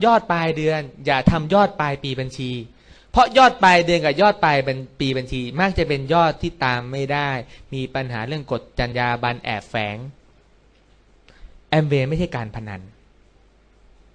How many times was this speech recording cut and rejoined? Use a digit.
1